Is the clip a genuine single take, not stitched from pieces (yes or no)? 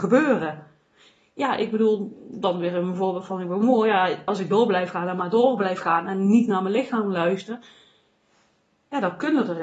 no